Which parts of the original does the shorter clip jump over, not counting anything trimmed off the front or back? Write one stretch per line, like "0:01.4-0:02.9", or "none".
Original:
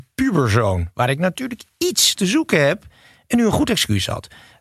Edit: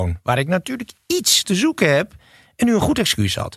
none